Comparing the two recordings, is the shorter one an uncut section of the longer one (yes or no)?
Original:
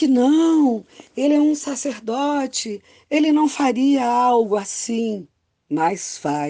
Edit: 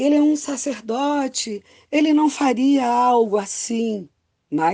yes